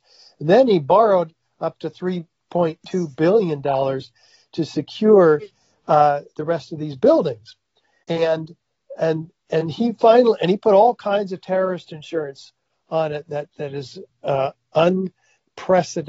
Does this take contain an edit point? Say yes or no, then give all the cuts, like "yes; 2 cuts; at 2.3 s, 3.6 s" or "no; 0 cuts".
no; 0 cuts